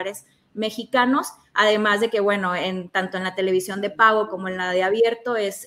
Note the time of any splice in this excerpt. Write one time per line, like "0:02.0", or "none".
none